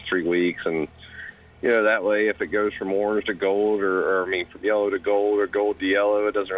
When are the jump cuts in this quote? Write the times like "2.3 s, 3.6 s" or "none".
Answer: none